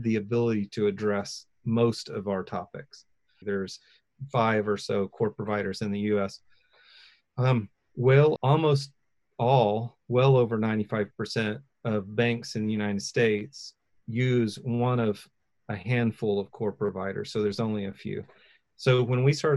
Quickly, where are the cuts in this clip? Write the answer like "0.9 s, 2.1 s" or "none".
3.4 s, 8.4 s